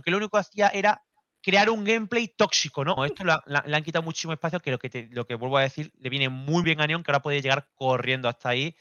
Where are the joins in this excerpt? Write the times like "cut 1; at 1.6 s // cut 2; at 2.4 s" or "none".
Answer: cut 1; at 3.0 s // cut 2; at 6.6 s